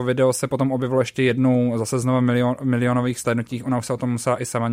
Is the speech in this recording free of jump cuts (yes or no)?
yes